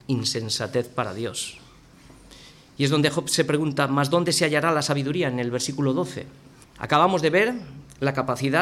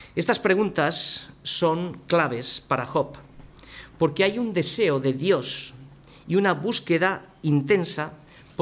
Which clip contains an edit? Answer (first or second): first